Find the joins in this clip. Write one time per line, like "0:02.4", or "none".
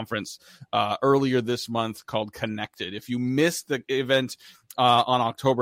none